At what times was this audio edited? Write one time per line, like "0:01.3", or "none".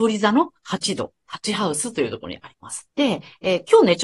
0:02.9